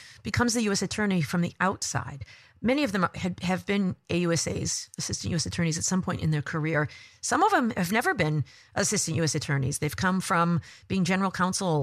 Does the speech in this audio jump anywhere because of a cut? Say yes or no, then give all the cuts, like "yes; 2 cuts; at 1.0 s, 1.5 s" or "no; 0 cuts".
no; 0 cuts